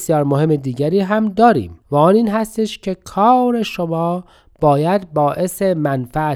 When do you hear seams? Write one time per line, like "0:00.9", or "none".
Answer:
0:01.8

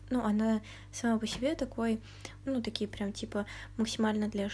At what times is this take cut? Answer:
0:02.4

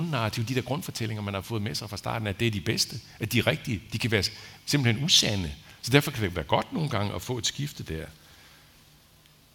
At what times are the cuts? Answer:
none

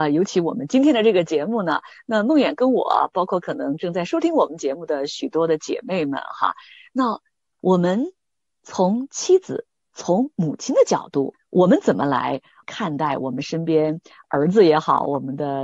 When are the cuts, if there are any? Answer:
none

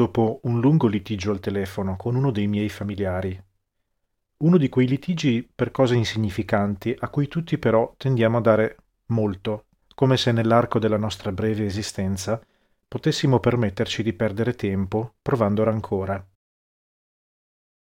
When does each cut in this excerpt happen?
0:09.8

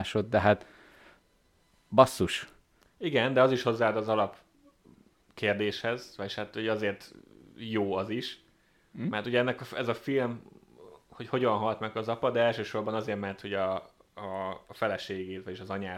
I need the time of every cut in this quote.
none

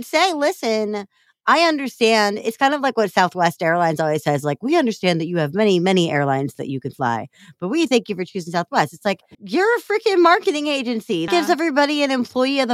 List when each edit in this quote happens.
0:09.3
0:11.3

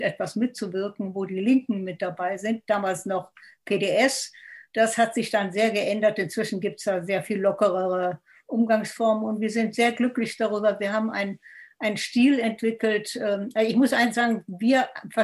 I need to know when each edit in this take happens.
none

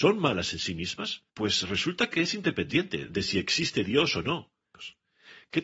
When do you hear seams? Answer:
0:01.3

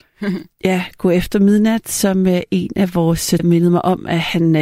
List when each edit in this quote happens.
0:03.4

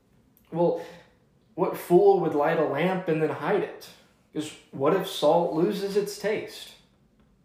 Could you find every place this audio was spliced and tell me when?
0:04.3

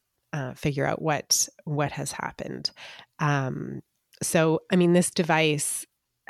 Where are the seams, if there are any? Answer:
none

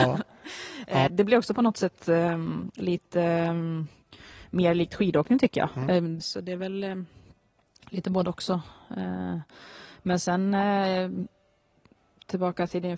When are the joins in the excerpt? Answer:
0:01.1
0:06.2

